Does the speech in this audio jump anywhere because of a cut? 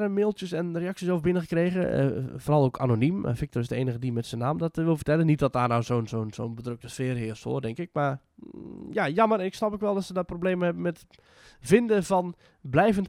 no; 0 cuts

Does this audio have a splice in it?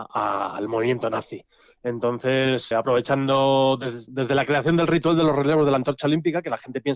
yes; 2 cuts; at 2.7 s, 4.1 s

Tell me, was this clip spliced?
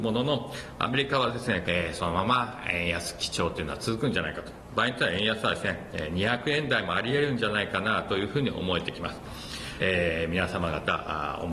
yes; 2 cuts; at 1.6 s, 9.8 s

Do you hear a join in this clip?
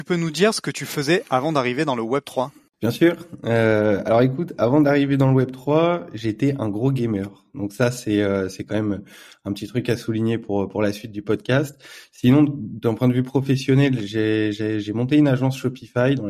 no; 0 cuts

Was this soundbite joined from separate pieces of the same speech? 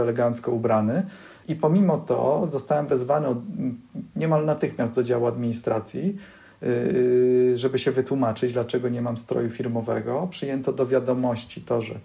no; 0 cuts

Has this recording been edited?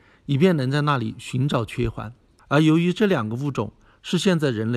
yes; 1 cut; at 2.4 s

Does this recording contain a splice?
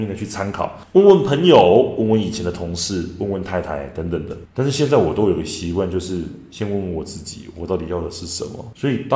no; 0 cuts

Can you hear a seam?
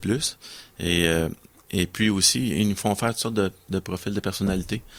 no; 0 cuts

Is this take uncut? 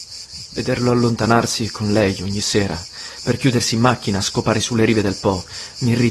yes; 0 cuts

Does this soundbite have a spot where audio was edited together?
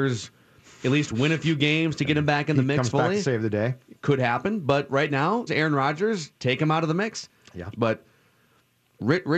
yes; 2 cuts; at 5.5 s, 7.7 s

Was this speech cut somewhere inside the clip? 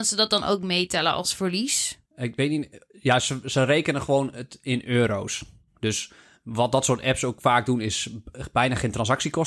yes; 1 cut; at 2.1 s

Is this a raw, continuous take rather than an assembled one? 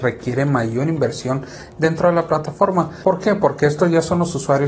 yes; 0 cuts

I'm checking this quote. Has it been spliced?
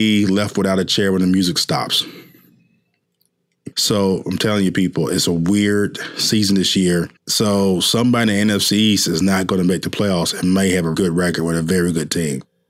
yes; 3 cuts; at 3.7 s, 7.2 s, 10.9 s

